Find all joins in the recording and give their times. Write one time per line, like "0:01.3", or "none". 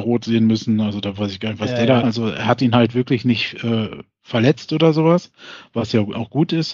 0:02.0